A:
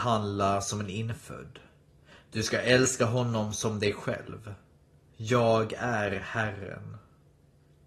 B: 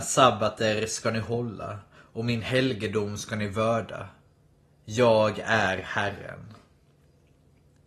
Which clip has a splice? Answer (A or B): A